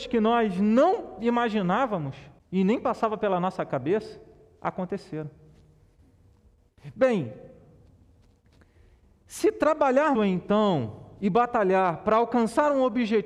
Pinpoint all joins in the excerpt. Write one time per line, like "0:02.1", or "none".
0:02.4
0:10.1